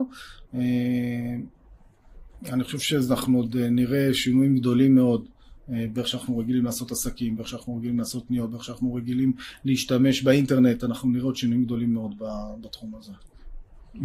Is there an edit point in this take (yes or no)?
no